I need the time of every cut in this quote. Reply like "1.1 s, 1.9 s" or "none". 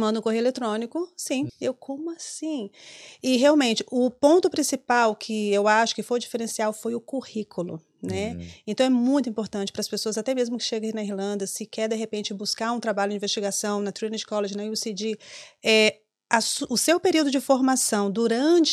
1.5 s